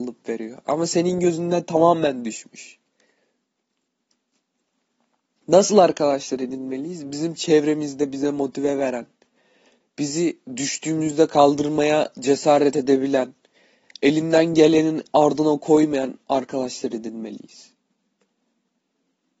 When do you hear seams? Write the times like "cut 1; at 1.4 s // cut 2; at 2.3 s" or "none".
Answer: cut 1; at 9.8 s

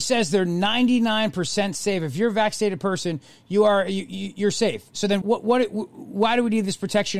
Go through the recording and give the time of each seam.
cut 1; at 5.2 s

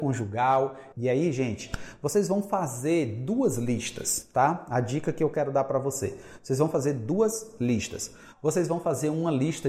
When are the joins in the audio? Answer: cut 1; at 0.9 s

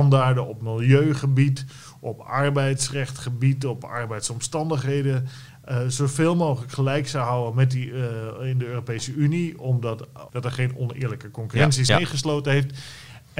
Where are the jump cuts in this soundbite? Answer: cut 1; at 10.3 s // cut 2; at 11.9 s

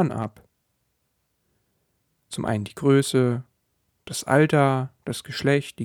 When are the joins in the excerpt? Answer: none

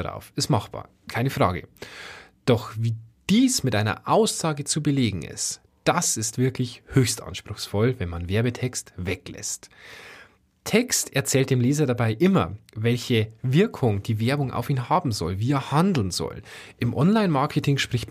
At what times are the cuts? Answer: none

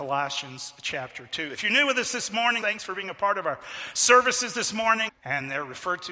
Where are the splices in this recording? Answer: cut 1; at 2.6 s // cut 2; at 5.1 s

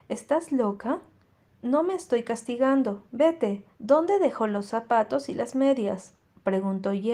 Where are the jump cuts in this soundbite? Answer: cut 1; at 1.4 s // cut 2; at 3.7 s

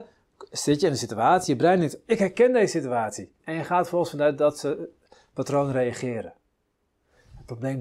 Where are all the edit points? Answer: cut 1; at 3.4 s

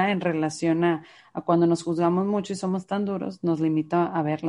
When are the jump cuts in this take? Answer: none

